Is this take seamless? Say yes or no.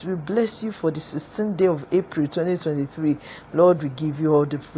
yes